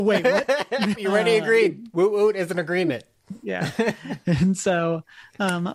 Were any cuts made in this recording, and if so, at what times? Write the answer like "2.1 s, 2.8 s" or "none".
0.9 s